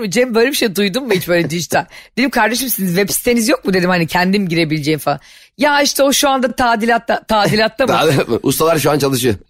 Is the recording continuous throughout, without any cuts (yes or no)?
yes